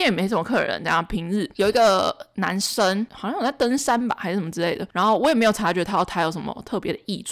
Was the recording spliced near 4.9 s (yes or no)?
yes